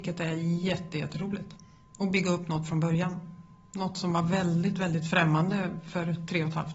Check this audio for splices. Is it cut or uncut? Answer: uncut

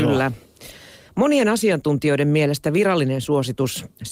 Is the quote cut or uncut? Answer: cut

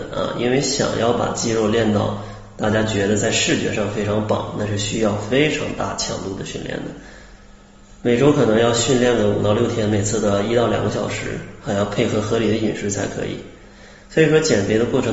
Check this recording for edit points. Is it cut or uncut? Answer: uncut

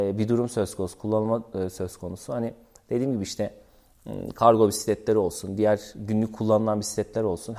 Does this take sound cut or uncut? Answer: uncut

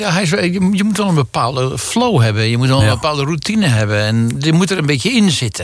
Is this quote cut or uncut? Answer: uncut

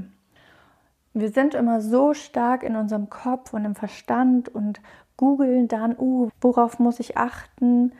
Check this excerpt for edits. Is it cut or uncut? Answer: cut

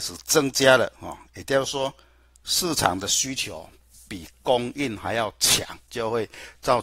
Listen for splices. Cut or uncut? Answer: uncut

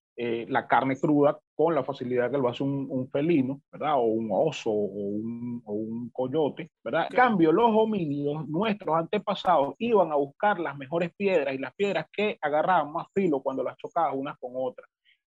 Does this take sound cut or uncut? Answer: cut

